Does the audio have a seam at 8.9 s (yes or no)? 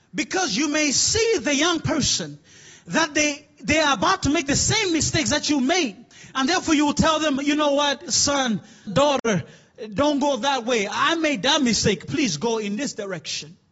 yes